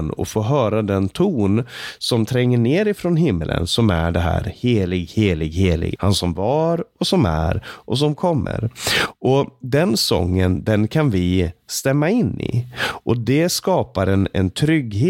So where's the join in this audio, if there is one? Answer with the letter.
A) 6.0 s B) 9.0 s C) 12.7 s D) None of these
A